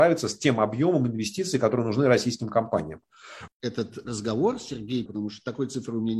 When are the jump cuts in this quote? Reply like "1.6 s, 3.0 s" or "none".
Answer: 3.5 s, 5.1 s